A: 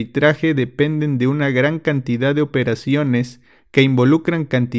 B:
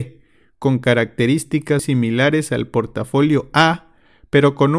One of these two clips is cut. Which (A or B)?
B